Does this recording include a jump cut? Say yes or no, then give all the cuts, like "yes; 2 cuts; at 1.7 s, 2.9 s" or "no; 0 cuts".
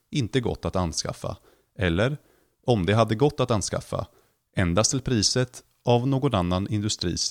no; 0 cuts